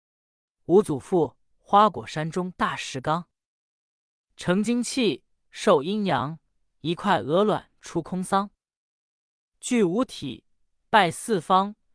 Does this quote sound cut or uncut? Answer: cut